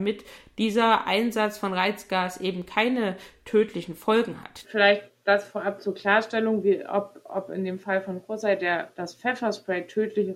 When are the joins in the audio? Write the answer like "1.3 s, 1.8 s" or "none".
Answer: 4.6 s